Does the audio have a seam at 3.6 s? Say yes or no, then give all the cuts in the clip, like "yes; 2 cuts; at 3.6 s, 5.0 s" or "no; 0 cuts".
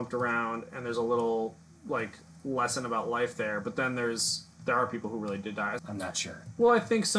no; 1 cut; at 5.8 s